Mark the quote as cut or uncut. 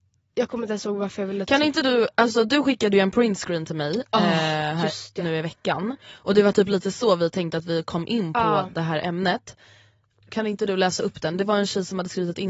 uncut